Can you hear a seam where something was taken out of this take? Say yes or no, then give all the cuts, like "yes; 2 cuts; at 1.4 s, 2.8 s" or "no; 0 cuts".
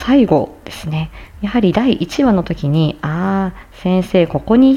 yes; 1 cut; at 1.3 s